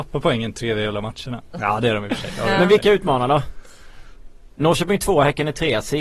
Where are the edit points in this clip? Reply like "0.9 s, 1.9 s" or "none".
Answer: 1.5 s

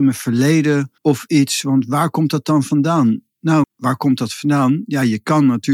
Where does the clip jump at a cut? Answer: 1.0 s, 3.6 s

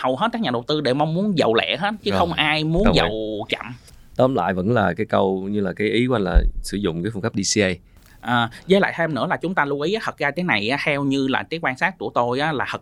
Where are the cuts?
none

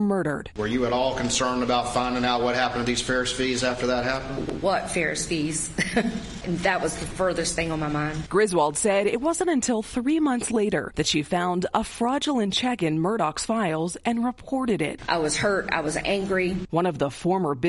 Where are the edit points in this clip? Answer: none

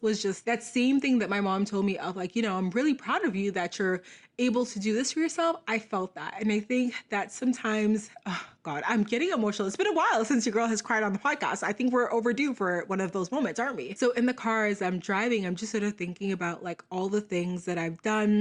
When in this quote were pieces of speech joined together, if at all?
14.0 s

